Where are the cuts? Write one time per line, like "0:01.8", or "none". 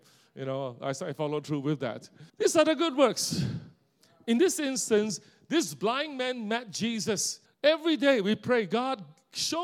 0:02.3
0:07.4